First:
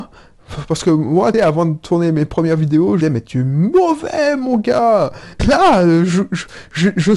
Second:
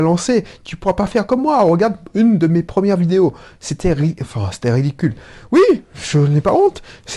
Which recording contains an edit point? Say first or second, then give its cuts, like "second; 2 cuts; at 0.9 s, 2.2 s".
first; 3 cuts; at 1.3 s, 3.0 s, 5.4 s